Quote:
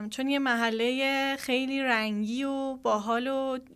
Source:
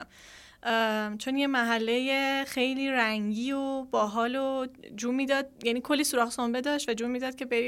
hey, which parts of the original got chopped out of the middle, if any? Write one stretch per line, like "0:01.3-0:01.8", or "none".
none